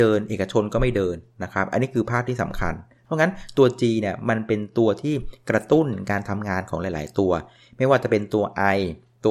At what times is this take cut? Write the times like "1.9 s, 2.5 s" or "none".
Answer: none